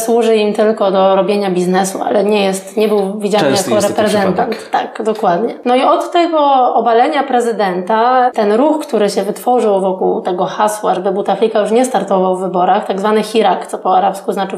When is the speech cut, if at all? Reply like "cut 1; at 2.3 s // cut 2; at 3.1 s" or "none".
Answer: none